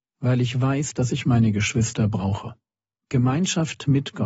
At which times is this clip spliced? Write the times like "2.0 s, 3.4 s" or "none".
3.0 s